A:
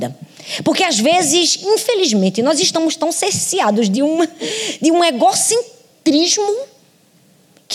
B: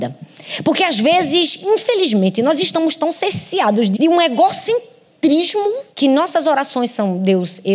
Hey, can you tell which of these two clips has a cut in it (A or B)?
B